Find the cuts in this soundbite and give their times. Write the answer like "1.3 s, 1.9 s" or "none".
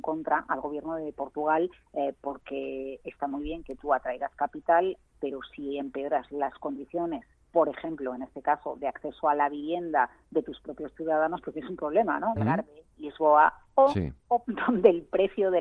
12.4 s, 14.4 s